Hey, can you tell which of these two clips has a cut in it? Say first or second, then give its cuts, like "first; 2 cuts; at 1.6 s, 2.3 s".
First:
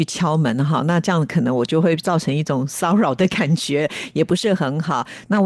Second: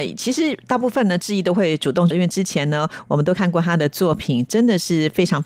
second; 1 cut; at 2.1 s